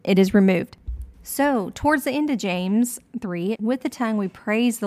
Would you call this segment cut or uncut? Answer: cut